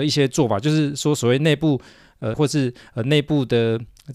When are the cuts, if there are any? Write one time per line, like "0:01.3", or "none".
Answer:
0:02.3